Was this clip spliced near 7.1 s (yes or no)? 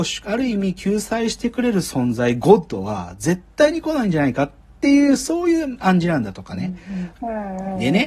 yes